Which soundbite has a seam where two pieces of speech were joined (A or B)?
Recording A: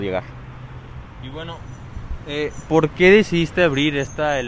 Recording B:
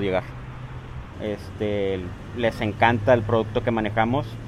B